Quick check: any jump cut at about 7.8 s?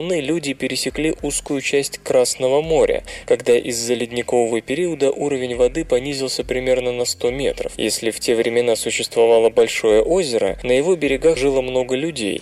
no; 1 cut; at 11.4 s

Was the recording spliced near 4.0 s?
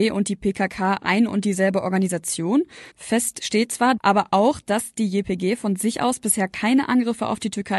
yes; 2 cuts; at 2.9 s, 4.0 s

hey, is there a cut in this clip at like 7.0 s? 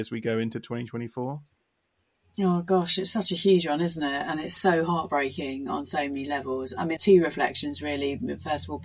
yes; 1 cut; at 7.0 s

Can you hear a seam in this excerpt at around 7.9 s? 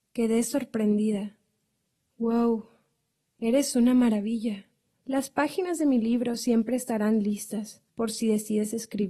yes; 2 cuts; at 4.9 s, 7.9 s

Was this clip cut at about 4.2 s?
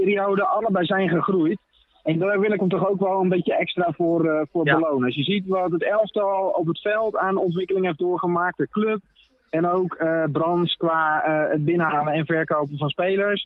no; 0 cuts

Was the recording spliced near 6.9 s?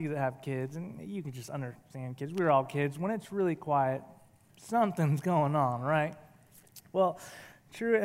no; 0 cuts

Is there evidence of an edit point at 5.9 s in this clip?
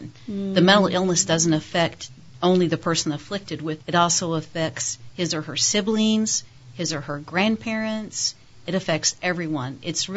no; 1 cut; at 3.8 s

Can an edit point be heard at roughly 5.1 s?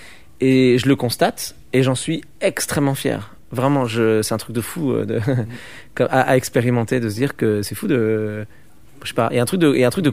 no; 0 cuts

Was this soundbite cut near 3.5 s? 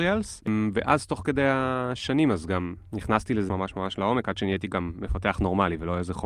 yes; 1 cut; at 3.5 s

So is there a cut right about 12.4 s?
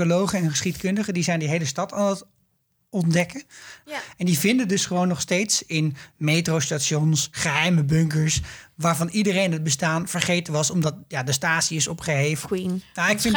yes; 2 cuts; at 3.8 s, 12.4 s

